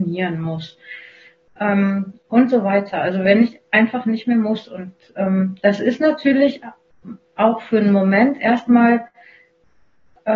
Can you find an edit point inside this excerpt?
no; 0 cuts

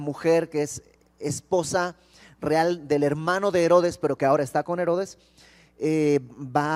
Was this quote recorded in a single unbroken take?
yes; 0 cuts

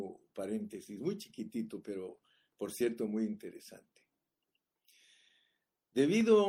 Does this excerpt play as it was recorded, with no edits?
yes; 0 cuts

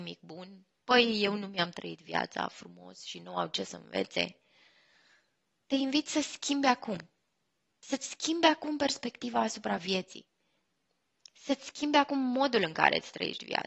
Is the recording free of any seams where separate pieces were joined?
yes; 0 cuts

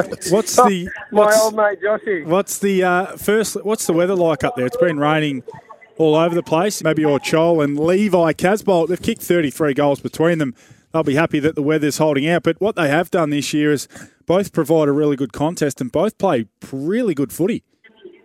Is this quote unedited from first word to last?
no; 1 cut; at 6.8 s

